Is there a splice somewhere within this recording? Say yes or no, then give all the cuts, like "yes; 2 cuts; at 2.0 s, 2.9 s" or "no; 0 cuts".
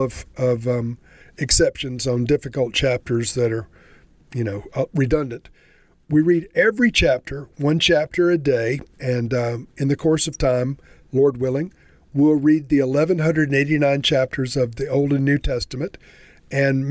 no; 0 cuts